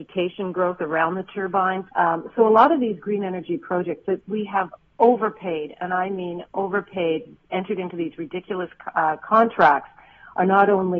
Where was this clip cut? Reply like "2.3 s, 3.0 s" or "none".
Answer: 1.9 s